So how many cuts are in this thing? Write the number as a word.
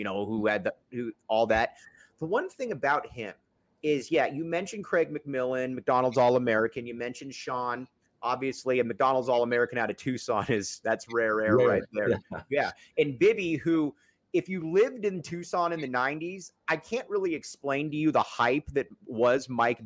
zero